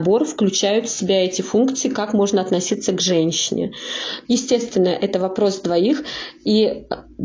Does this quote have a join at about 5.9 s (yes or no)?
no